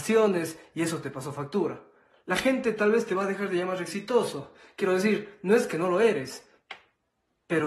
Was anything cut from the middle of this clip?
no; 0 cuts

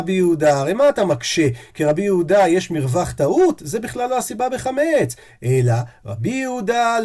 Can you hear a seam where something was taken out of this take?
no; 0 cuts

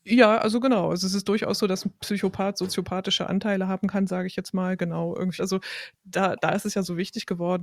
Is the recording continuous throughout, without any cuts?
no; 1 cut; at 5.4 s

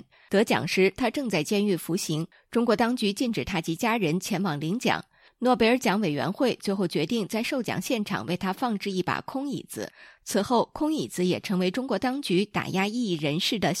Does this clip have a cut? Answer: no; 0 cuts

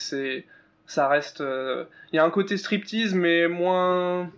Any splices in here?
no; 0 cuts

